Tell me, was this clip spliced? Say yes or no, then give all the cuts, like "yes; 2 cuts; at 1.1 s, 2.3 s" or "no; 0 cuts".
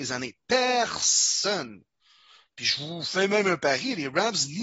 no; 0 cuts